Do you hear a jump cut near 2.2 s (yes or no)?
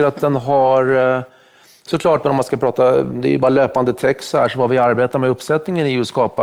yes